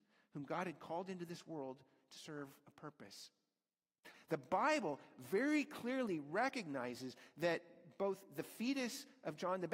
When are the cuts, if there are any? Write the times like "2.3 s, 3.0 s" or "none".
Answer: 4.1 s